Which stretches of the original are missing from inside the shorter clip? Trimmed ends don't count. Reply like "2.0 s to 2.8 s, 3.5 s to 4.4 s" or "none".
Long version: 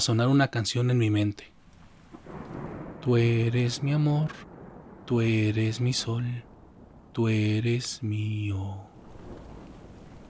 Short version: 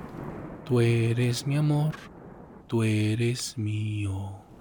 5.0 s to 7.1 s